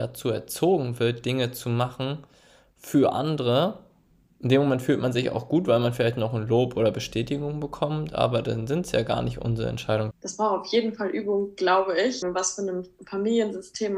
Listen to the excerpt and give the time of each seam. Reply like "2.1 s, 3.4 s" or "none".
10.1 s, 12.2 s